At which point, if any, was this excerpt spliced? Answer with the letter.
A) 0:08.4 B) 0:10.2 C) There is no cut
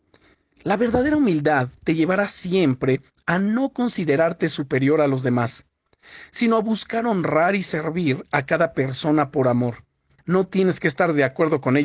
B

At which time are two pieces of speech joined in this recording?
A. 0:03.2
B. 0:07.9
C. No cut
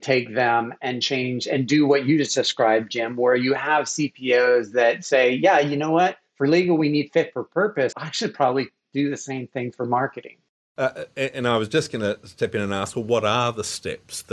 B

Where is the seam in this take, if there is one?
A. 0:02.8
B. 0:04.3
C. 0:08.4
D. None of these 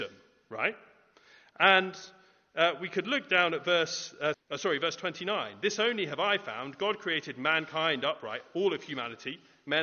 B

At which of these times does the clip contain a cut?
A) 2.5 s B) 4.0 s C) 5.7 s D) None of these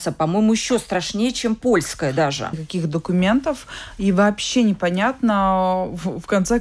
A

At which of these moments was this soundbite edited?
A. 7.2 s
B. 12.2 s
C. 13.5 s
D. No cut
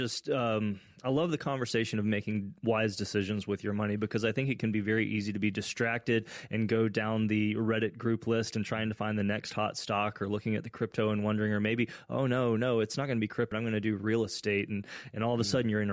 C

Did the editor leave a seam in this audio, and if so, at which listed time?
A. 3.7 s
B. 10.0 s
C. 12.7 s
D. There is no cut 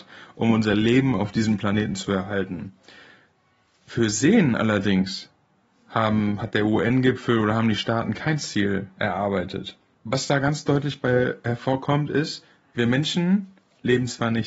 D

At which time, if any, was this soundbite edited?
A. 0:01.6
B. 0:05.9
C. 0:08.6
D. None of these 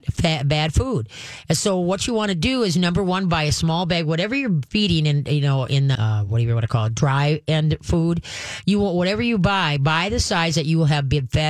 B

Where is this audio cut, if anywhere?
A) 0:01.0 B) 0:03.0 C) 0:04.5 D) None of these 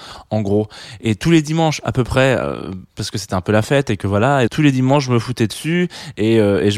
C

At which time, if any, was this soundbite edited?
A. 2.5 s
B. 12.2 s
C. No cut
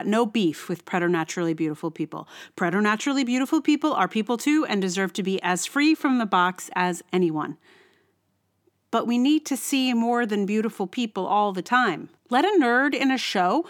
B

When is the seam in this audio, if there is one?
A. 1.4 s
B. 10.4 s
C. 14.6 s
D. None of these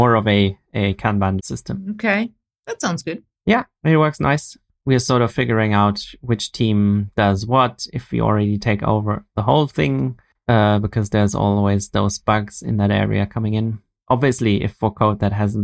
A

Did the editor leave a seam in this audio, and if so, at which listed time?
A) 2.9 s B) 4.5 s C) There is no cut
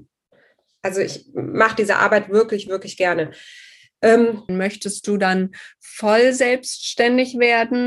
B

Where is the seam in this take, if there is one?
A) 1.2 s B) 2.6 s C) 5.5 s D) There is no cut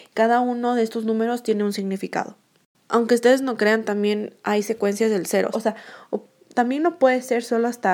C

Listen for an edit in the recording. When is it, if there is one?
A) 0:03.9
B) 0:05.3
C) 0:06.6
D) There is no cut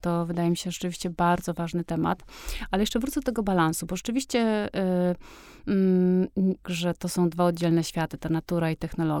C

